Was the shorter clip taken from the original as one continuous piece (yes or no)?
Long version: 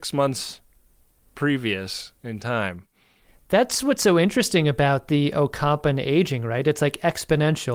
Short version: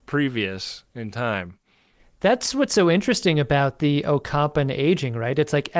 yes